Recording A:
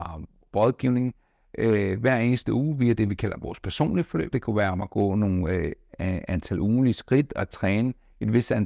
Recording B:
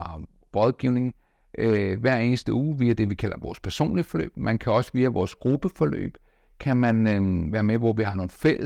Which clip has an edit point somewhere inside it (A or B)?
A